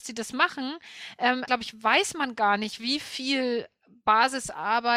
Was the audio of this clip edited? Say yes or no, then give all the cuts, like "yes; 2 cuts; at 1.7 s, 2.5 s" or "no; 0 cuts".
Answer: yes; 1 cut; at 1.5 s